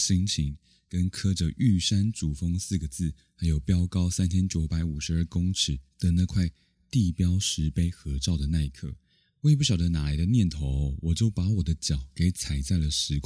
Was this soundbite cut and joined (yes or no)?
no